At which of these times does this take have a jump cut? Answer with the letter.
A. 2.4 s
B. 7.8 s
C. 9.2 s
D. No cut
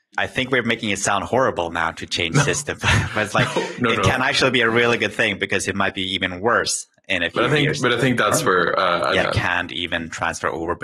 C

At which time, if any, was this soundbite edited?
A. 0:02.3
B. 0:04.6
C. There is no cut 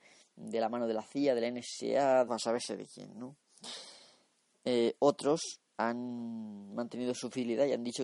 A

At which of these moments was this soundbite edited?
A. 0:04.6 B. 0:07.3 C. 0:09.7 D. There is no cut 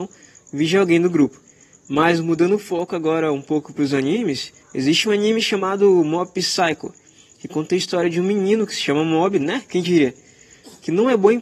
A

